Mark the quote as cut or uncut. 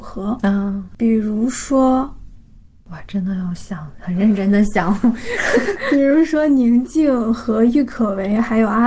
uncut